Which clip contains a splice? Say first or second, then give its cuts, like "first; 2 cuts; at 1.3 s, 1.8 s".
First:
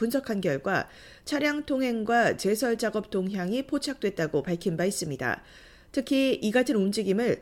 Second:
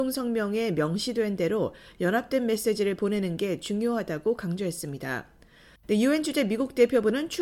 second; 1 cut; at 5.8 s